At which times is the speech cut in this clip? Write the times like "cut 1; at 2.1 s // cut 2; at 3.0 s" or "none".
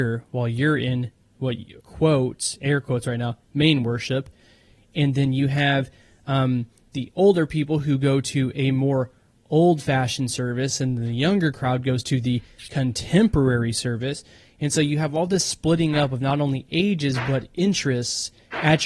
cut 1; at 1.8 s